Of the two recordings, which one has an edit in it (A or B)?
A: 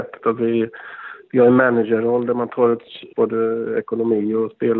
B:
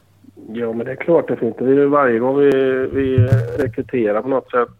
A